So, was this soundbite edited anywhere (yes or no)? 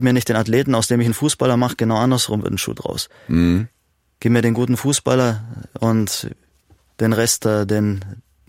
no